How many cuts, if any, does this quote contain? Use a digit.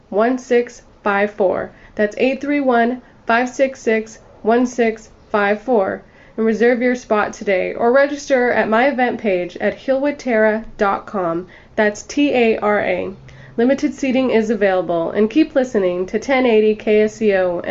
0